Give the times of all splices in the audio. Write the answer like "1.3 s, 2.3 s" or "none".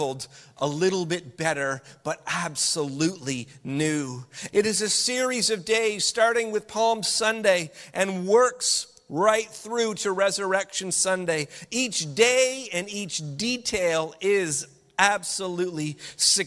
4.5 s